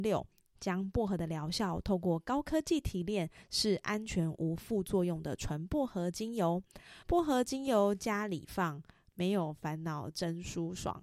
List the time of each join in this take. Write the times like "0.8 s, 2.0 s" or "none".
7.0 s